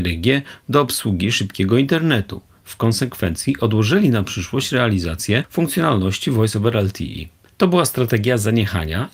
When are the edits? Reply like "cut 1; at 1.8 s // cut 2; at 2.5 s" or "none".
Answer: none